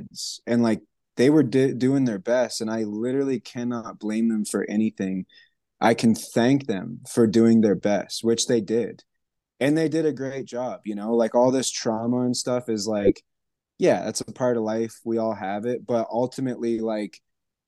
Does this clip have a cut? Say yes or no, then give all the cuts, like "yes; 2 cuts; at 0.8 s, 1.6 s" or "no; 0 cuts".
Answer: no; 0 cuts